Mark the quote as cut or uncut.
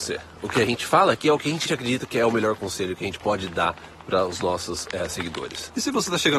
cut